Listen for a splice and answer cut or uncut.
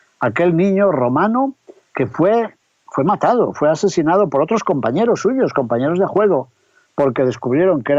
uncut